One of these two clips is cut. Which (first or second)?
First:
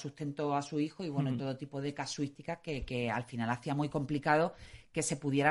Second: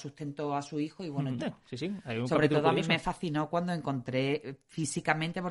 second